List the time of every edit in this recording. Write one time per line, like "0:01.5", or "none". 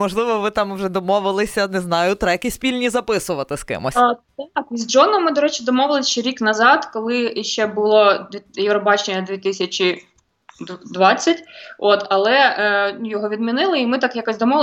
none